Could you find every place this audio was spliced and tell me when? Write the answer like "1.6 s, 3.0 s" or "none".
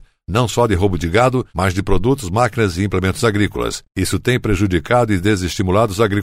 none